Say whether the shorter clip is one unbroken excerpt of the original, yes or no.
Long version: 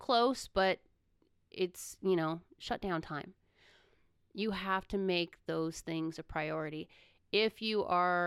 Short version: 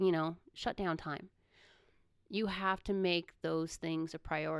yes